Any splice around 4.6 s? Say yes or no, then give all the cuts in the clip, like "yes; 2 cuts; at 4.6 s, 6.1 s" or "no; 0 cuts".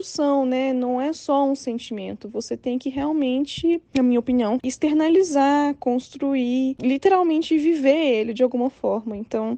yes; 1 cut; at 4.6 s